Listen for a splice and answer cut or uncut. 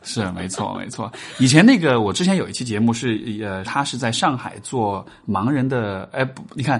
cut